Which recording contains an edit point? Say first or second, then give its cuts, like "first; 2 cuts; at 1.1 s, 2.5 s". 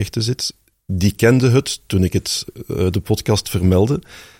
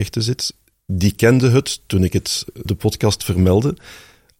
second; 1 cut; at 2.6 s